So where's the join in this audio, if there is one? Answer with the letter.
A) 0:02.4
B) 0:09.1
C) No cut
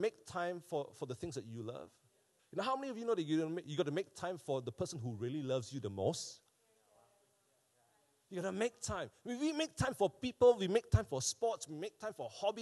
A